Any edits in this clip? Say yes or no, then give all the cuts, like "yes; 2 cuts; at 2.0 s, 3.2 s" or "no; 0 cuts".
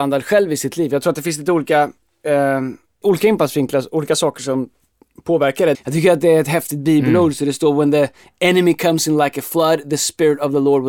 yes; 2 cuts; at 3.0 s, 5.7 s